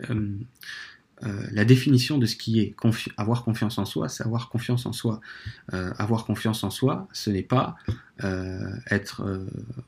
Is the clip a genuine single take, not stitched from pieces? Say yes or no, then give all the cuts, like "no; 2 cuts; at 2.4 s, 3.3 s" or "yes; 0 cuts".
yes; 0 cuts